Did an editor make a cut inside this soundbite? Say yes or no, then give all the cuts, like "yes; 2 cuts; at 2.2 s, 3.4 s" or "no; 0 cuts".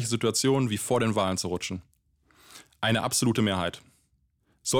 no; 0 cuts